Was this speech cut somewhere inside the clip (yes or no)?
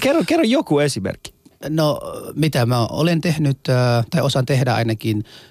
no